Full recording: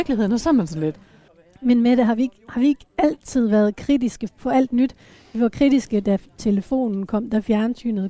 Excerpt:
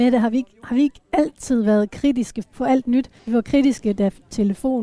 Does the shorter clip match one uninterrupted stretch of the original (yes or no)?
no